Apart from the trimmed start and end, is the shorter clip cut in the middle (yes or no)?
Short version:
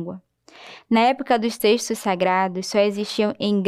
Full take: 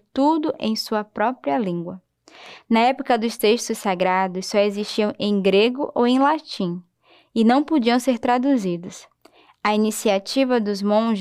no